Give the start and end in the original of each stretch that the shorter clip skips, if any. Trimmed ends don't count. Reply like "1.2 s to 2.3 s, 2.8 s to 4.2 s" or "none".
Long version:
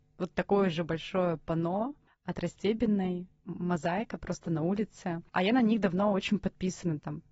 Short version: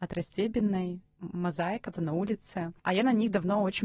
4.2 s to 4.4 s